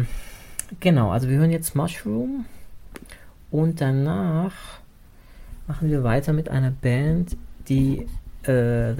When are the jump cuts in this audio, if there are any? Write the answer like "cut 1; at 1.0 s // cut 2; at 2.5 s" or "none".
none

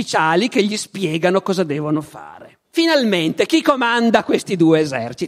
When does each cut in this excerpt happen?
cut 1; at 2.6 s

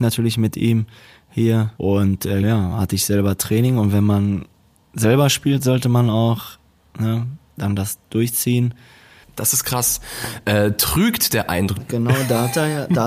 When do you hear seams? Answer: cut 1; at 2.4 s // cut 2; at 9.2 s // cut 3; at 11.8 s

